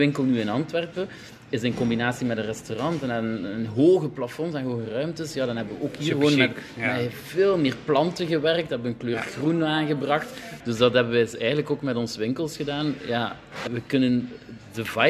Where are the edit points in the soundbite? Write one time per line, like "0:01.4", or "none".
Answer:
0:10.6
0:13.7